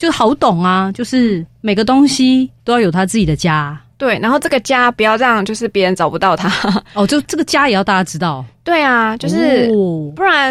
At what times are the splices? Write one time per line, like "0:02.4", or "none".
0:02.6